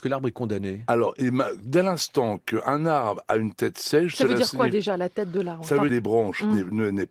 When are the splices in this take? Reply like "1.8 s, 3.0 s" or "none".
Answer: 5.9 s